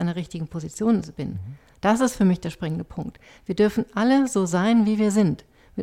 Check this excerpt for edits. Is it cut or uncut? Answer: uncut